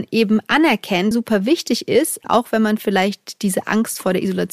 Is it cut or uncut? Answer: cut